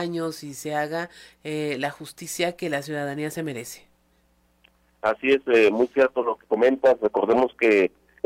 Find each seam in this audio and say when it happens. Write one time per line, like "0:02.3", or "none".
none